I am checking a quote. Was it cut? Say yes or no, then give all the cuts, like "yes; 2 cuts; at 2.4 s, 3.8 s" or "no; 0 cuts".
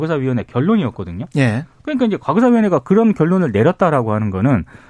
no; 0 cuts